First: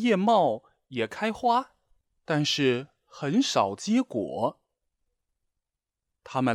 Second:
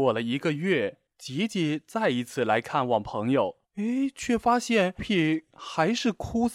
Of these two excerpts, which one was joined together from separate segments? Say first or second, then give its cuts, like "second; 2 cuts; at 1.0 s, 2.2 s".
second; 3 cuts; at 1.1 s, 3.6 s, 5.0 s